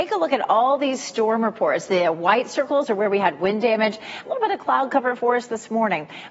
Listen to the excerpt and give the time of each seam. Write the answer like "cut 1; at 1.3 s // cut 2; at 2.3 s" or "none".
cut 1; at 4.2 s